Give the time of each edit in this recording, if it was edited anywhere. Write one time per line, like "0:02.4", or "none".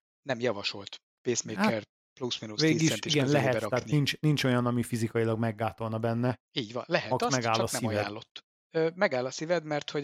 none